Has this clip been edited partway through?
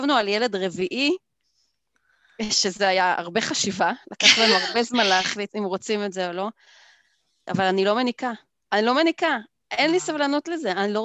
yes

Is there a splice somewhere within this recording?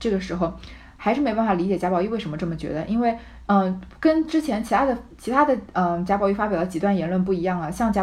yes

